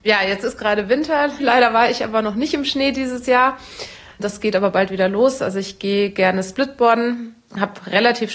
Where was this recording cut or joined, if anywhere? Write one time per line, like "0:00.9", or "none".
none